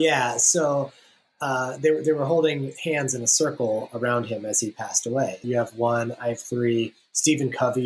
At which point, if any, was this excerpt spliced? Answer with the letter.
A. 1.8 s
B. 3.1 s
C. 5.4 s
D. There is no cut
C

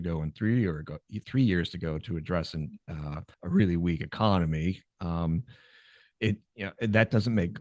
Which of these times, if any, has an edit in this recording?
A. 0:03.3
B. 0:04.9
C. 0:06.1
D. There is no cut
A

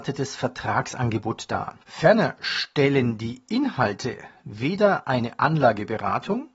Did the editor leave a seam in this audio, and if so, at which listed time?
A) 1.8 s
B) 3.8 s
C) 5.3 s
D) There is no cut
A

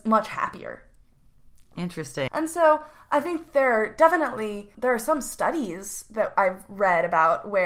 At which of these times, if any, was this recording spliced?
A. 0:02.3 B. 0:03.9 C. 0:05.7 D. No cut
A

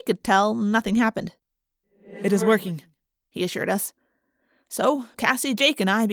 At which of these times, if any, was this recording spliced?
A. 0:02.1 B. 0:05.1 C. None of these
B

